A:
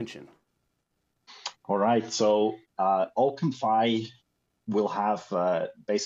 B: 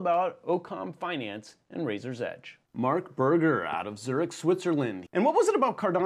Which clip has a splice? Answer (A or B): B